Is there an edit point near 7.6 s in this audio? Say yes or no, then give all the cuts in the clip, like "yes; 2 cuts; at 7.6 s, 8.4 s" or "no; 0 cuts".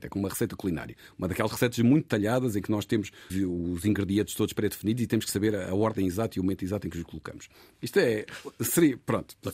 no; 1 cut; at 3.3 s